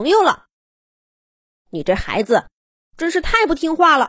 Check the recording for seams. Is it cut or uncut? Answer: uncut